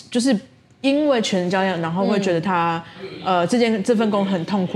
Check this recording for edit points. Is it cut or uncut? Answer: uncut